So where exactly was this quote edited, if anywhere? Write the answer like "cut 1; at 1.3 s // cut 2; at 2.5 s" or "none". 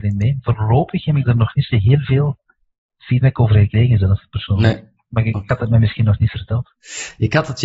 none